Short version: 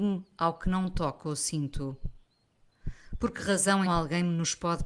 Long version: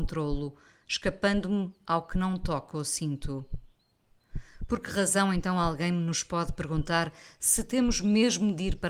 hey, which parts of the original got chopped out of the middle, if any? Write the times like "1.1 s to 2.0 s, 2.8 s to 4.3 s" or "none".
5.3 s to 5.5 s